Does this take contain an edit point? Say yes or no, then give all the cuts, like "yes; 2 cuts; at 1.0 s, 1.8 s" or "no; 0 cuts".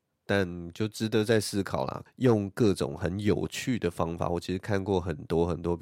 yes; 1 cut; at 2.1 s